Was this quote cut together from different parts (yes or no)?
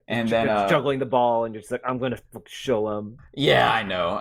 yes